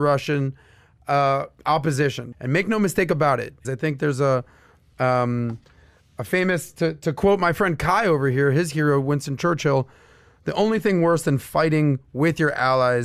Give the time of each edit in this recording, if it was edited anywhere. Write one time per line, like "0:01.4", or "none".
0:02.3
0:03.6